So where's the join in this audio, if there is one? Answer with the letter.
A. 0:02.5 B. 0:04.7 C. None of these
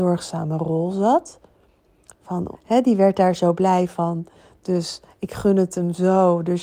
A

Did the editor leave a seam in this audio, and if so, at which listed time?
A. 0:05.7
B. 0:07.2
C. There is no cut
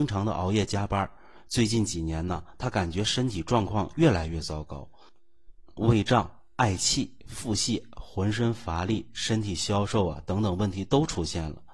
A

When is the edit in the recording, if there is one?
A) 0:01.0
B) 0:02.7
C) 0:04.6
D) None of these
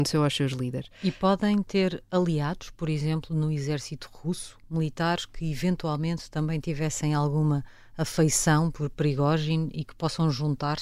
C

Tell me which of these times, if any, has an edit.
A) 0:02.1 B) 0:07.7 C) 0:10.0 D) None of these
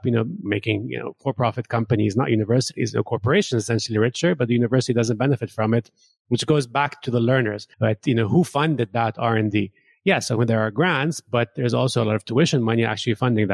B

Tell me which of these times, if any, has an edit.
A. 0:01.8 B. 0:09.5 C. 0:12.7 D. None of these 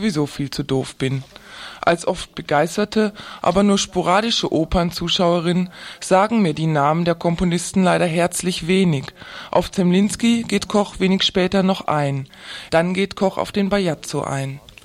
C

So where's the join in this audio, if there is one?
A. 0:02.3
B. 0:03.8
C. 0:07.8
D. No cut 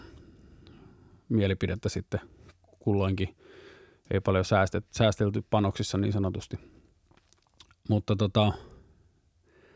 D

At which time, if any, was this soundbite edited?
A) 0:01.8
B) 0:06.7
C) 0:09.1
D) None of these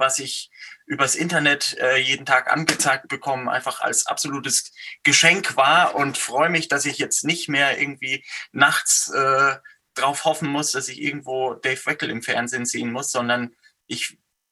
D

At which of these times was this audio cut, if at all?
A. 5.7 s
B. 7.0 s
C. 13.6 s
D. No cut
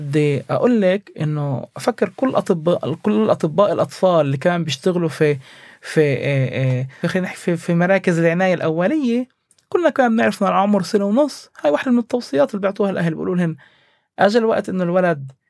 B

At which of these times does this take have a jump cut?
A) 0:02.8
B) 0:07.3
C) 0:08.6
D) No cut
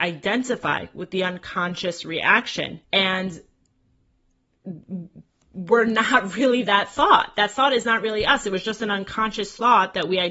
A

